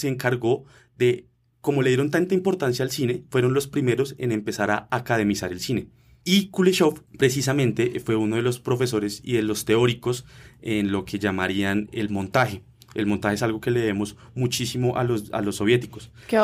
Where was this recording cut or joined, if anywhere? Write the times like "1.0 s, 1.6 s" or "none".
6.2 s

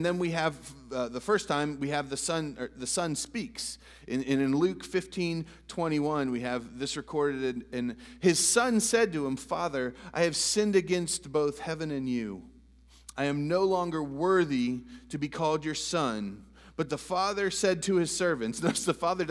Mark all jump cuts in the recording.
none

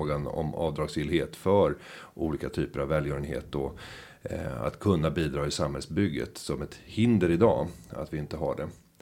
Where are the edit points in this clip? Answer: none

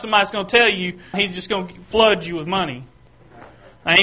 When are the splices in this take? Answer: 1.1 s

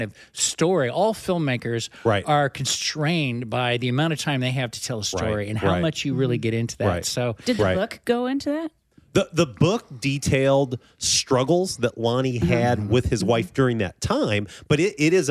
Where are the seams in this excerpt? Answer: none

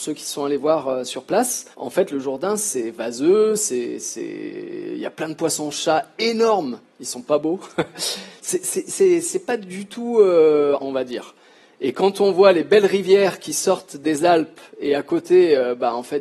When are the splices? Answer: 1.7 s, 10.8 s

